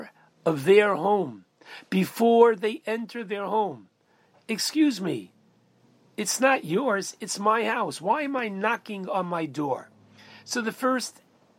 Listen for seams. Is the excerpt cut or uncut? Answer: uncut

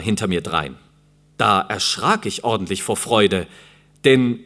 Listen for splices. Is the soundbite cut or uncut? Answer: cut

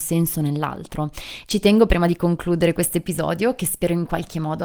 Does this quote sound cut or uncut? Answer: cut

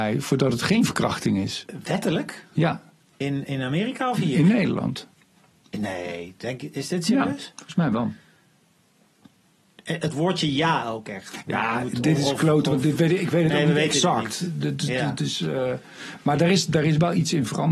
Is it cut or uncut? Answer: cut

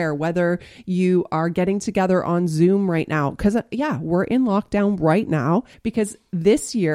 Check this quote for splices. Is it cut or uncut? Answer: cut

